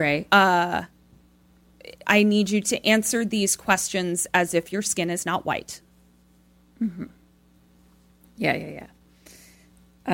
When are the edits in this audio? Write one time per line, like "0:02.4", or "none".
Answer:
none